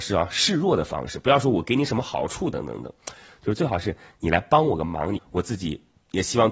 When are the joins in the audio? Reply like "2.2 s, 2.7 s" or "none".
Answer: 2.5 s, 5.2 s